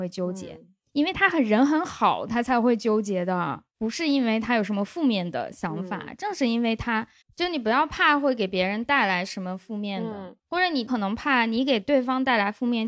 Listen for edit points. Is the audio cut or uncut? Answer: cut